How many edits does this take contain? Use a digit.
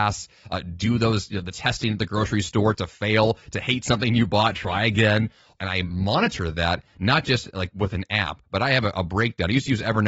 2